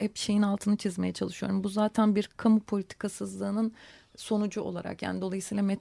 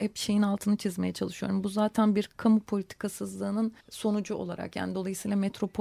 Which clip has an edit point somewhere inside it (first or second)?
second